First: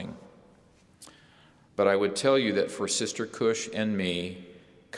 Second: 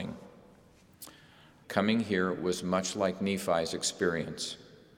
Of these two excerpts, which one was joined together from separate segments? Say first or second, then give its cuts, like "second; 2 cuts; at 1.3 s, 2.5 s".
second; 1 cut; at 1.6 s